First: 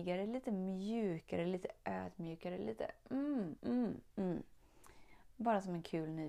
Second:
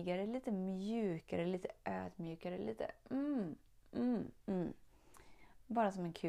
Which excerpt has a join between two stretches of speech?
first; 1 cut; at 3.6 s

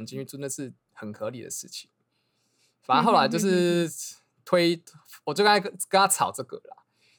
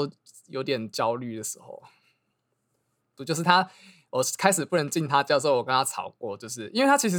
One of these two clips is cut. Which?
second; 1 cut; at 3.2 s

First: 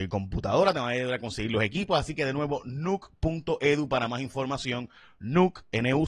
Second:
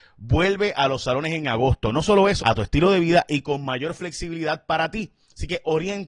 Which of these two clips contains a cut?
second; 1 cut; at 2.4 s

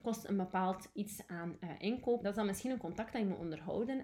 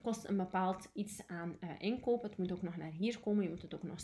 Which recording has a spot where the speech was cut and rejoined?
first; 1 cut; at 2.2 s

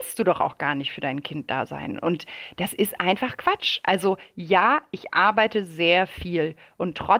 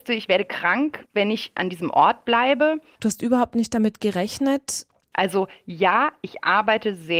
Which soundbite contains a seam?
second; 1 cut; at 5.1 s

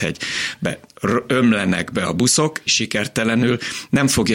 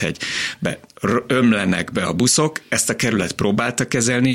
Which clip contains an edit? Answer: first; 1 cut; at 2.7 s

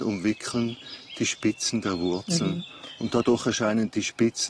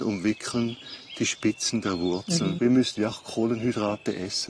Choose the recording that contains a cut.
second; 1 cut; at 2.6 s

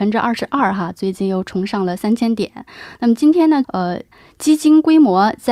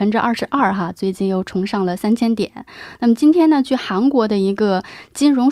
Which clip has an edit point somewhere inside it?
first; 1 cut; at 3.6 s

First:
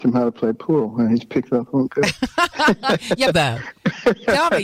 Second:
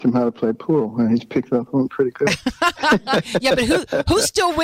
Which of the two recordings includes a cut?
first; 2 cuts; at 1.9 s, 3.3 s

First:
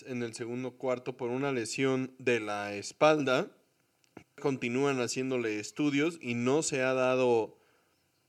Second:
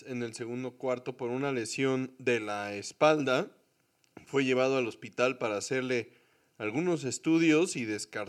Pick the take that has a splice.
first; 1 cut; at 4.2 s

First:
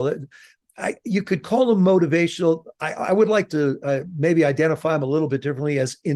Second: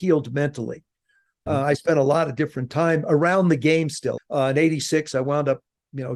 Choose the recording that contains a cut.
second; 2 cuts; at 1.5 s, 4.2 s

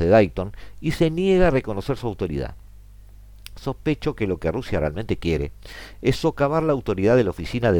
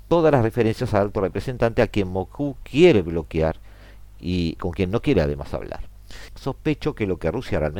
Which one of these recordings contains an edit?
second; 2 cuts; at 4.6 s, 6.3 s

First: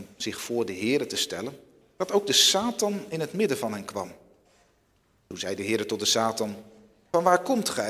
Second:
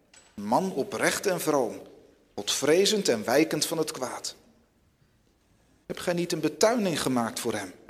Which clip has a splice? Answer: second; 1 cut; at 5.8 s

